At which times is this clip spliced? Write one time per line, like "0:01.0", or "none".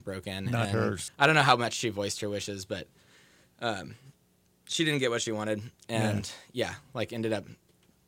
0:01.1